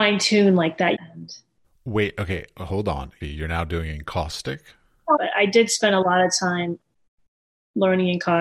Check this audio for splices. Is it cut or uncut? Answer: cut